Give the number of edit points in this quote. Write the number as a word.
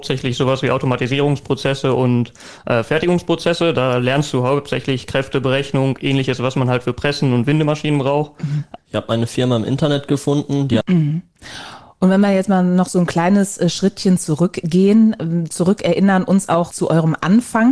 three